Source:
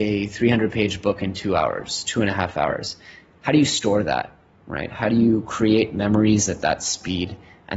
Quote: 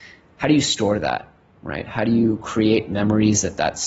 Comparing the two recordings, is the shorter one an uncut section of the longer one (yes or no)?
yes